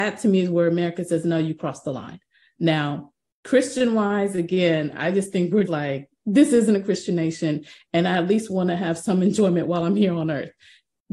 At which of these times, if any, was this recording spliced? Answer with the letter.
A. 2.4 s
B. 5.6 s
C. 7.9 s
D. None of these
B